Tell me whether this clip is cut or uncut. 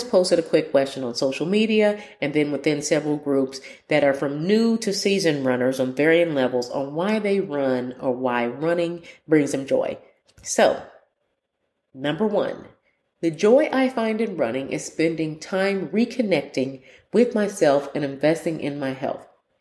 cut